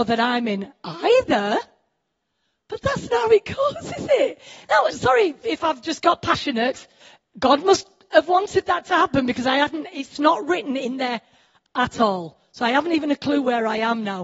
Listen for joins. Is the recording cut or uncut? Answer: cut